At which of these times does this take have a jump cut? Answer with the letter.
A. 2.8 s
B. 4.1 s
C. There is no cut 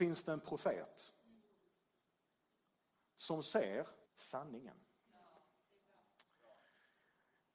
B